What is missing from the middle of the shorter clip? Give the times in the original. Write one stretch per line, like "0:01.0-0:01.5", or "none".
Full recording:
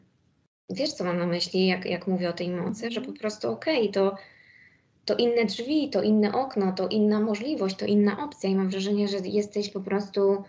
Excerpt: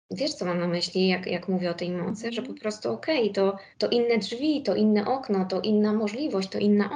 0:04.3-0:05.0